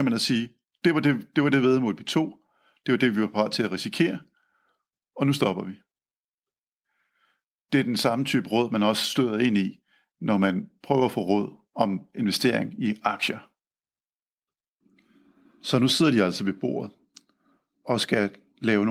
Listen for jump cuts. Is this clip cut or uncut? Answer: uncut